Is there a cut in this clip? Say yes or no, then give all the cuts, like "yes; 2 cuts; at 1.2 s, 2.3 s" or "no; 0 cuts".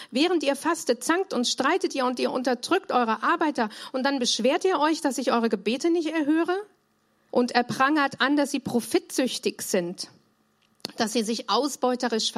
yes; 1 cut; at 7.3 s